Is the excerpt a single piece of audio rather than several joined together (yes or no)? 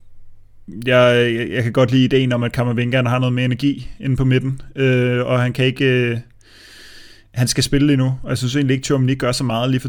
yes